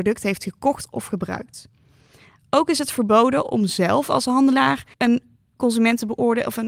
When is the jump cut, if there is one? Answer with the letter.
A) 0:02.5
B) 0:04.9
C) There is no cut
B